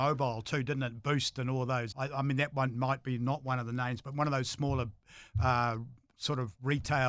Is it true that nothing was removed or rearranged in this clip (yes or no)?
no